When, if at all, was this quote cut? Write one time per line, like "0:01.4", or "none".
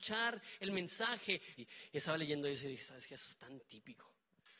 0:01.6